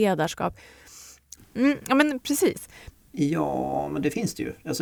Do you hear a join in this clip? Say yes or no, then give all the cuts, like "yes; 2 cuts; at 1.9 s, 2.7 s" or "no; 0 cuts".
yes; 2 cuts; at 1.4 s, 2.9 s